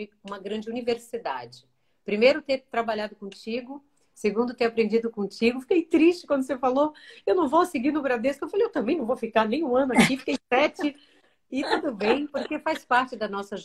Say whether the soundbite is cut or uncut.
uncut